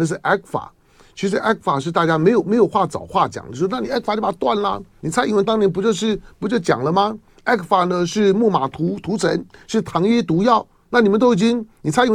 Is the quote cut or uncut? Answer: cut